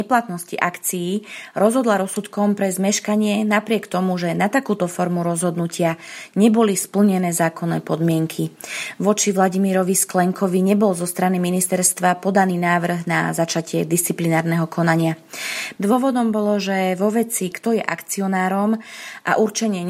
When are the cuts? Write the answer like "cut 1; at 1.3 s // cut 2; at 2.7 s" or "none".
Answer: cut 1; at 15.8 s // cut 2; at 17.5 s